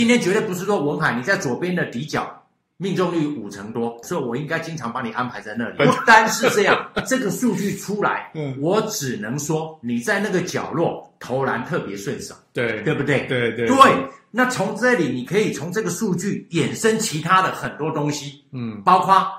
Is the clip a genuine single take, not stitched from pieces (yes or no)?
no